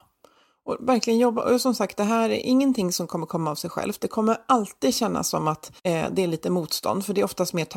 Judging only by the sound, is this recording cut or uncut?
cut